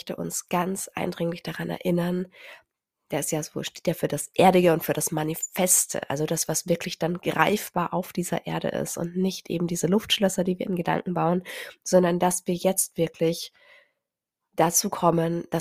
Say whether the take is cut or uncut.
uncut